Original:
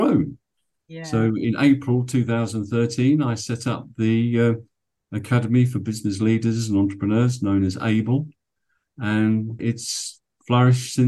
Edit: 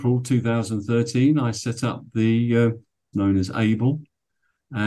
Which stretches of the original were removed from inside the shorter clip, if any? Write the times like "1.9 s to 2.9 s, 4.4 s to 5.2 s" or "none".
5.0 s to 7.4 s